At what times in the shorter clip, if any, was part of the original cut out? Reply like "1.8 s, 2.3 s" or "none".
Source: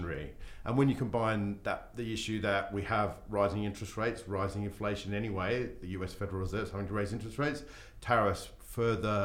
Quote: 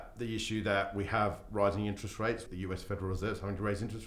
2.5 s